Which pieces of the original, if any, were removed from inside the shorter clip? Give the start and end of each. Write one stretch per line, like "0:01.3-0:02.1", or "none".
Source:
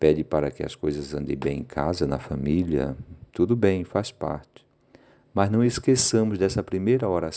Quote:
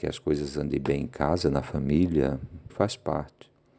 0:03.3-0:03.8